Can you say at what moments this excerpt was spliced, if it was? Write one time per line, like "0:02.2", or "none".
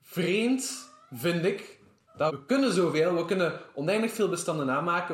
0:02.3